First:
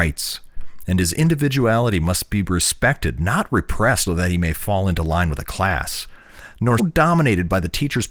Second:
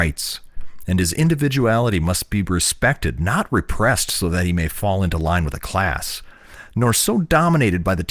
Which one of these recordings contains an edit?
first; 2 cuts; at 4.1 s, 6.8 s

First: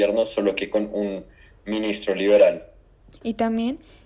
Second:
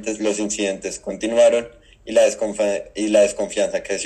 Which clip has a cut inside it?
first; 1 cut; at 3.2 s

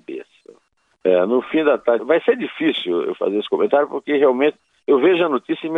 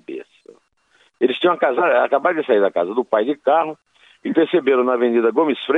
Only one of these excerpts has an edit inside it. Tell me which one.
first; 2 cuts; at 0.9 s, 2.0 s

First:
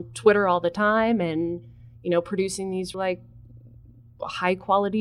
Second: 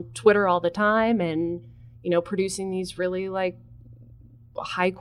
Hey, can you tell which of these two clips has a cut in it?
first; 1 cut; at 2.9 s

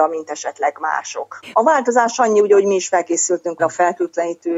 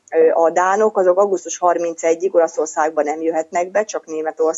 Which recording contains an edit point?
first; 2 cuts; at 1.5 s, 3.6 s

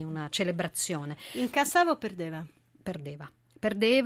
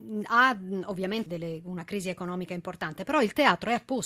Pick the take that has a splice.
second; 1 cut; at 1.3 s

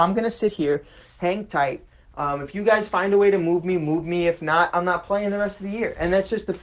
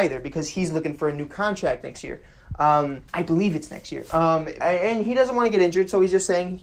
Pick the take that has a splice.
second; 2 cuts; at 3.1 s, 4.6 s

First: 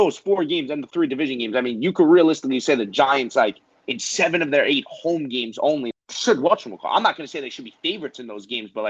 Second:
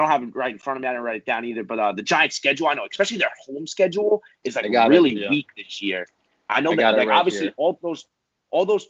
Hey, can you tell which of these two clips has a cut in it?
first; 1 cut; at 5.9 s

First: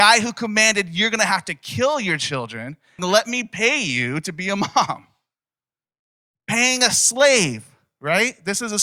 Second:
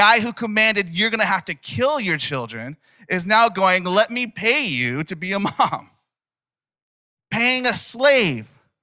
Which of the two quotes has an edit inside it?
first; 1 cut; at 3.0 s

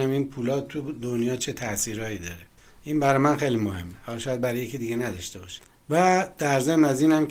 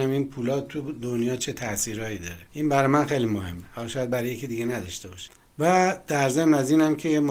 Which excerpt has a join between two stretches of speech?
second; 1 cut; at 2.5 s

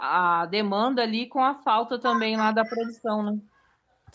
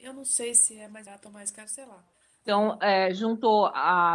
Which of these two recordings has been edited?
second; 1 cut; at 2.4 s

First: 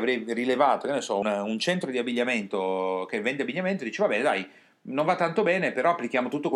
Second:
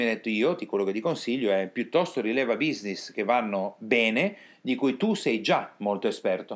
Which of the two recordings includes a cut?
first; 1 cut; at 1.2 s

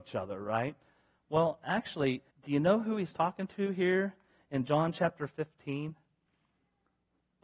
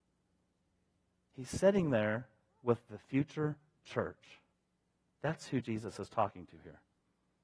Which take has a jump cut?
first; 1 cut; at 2.3 s

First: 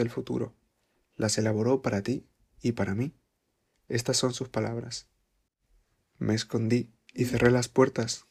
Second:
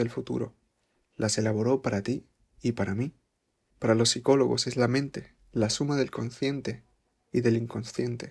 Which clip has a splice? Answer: second; 1 cut; at 3.7 s

